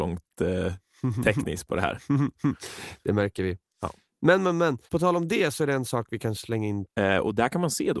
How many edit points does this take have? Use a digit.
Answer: 2